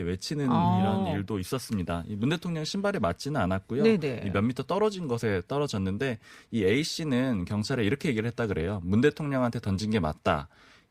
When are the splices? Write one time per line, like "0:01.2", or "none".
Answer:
none